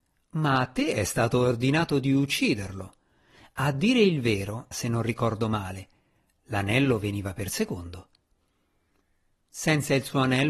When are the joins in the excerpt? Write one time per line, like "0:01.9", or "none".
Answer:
0:04.7